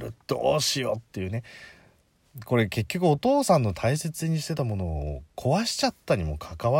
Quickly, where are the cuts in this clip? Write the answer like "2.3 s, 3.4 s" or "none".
none